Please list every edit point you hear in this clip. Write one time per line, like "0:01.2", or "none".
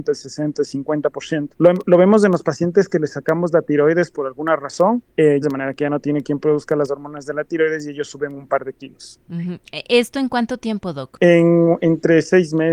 0:01.5
0:05.4